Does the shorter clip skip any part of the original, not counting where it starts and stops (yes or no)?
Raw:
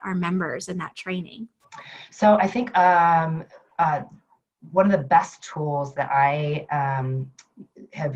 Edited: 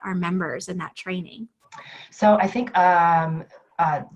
no